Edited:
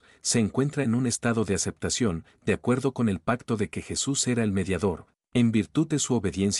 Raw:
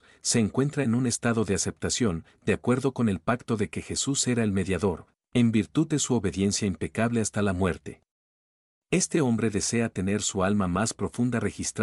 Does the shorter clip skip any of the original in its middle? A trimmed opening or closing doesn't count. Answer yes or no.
no